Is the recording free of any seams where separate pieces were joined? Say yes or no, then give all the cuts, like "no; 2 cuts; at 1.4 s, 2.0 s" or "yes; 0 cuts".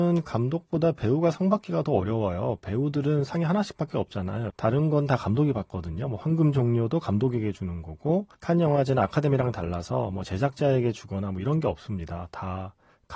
no; 2 cuts; at 4.5 s, 8.3 s